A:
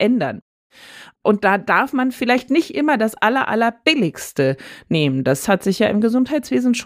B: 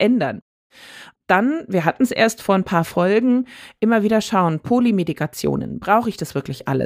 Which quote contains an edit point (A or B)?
A